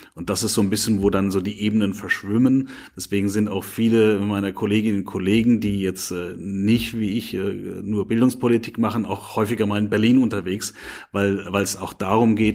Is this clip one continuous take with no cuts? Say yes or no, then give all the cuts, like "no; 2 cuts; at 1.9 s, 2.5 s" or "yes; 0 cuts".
yes; 0 cuts